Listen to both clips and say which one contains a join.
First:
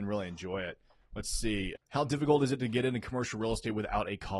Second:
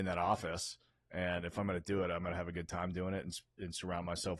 first; 1 cut; at 1.8 s

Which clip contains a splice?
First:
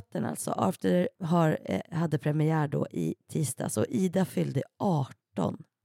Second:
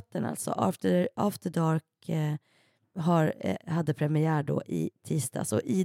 first; 1 cut; at 1.2 s

